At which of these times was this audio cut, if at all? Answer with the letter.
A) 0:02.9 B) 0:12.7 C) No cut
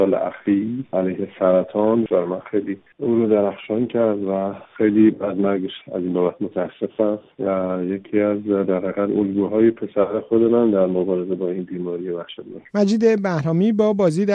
B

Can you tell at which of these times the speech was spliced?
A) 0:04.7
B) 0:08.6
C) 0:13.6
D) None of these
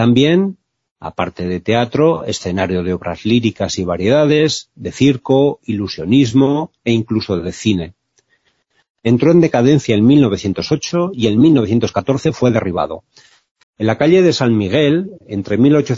C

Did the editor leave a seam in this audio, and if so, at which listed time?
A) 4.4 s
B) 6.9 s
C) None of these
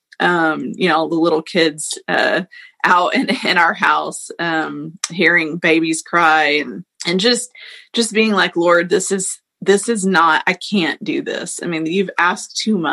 B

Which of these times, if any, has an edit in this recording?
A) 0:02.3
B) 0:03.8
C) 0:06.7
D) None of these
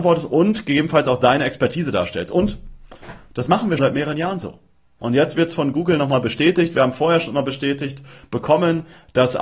B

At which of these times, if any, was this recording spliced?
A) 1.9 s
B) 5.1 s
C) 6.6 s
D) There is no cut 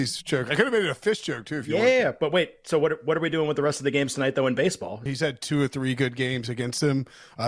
B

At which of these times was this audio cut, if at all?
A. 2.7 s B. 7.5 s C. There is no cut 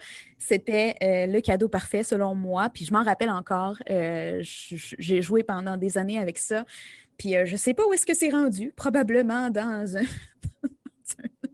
C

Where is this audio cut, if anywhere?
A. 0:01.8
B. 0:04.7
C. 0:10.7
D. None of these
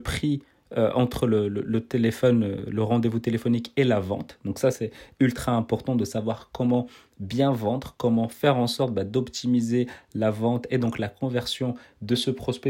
D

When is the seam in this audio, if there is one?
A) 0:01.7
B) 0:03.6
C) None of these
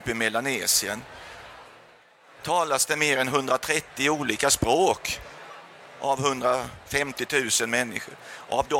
C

